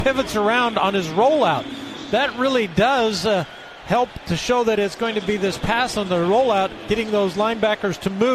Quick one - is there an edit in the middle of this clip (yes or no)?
no